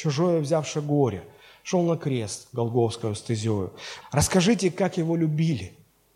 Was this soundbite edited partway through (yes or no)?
yes